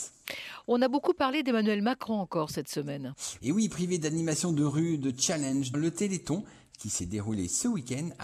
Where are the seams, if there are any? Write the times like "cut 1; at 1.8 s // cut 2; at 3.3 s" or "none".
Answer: cut 1; at 3.4 s // cut 2; at 5.7 s